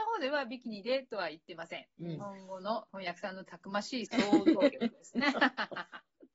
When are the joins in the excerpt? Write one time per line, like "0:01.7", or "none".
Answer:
0:02.9